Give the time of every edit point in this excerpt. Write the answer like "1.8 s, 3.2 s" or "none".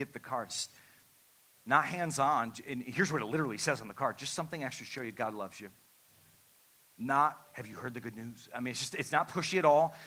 none